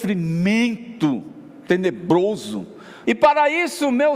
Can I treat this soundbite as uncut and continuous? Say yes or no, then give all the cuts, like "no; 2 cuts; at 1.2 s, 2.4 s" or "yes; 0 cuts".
no; 1 cut; at 3.0 s